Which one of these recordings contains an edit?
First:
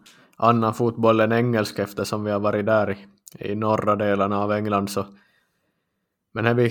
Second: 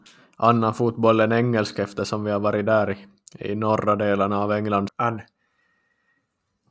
second; 1 cut; at 4.9 s

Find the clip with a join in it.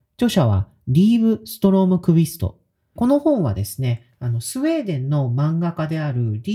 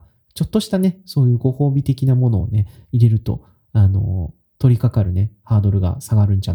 first; 1 cut; at 3.0 s

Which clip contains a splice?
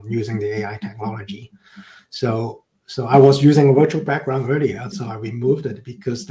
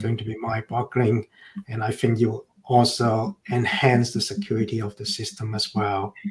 first; 1 cut; at 4.9 s

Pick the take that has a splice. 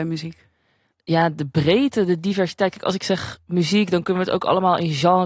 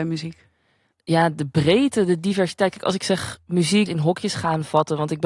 second; 1 cut; at 3.9 s

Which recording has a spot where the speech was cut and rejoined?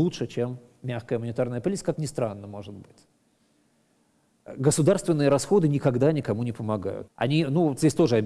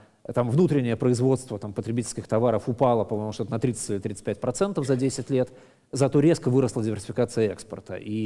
first; 2 cuts; at 1.9 s, 7.1 s

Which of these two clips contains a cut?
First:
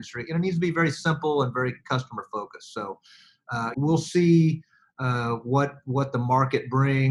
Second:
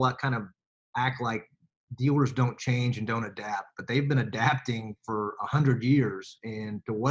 first; 1 cut; at 3.7 s

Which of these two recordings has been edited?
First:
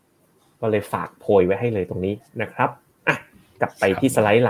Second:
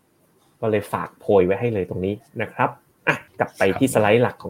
second; 1 cut; at 3.3 s

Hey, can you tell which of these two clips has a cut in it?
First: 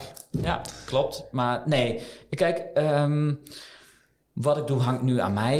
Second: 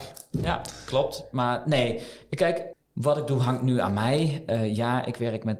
second; 1 cut; at 2.7 s

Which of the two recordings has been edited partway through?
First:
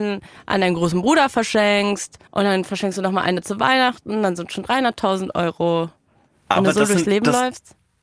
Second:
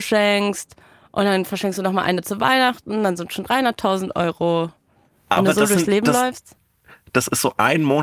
first; 1 cut; at 2.3 s

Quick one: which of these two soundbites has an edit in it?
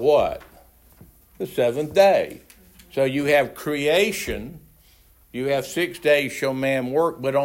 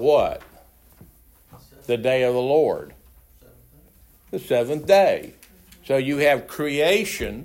first; 1 cut; at 1.2 s

